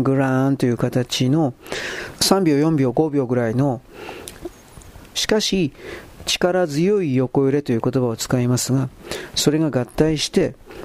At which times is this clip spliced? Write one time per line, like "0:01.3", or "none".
0:02.1
0:05.1